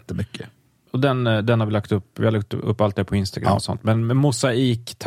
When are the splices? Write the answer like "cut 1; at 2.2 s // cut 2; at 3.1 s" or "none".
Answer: none